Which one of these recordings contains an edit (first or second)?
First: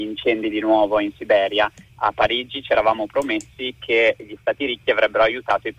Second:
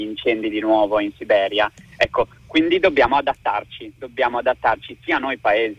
first